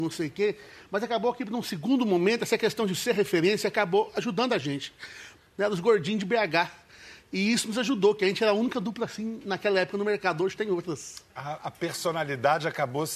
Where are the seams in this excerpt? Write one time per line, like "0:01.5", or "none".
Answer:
0:05.4